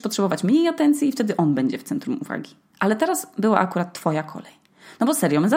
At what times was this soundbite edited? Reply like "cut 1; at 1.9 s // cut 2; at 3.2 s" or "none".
none